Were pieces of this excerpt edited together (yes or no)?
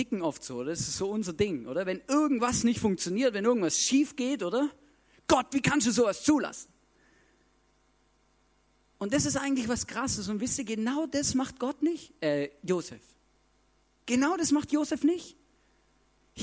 no